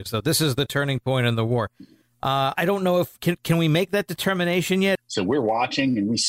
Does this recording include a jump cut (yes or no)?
yes